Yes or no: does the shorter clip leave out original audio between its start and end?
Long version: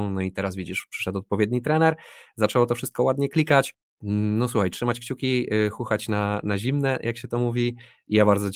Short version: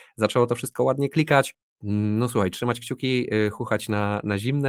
no